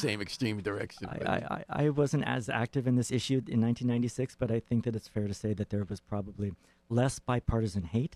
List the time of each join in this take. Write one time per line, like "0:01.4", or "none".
none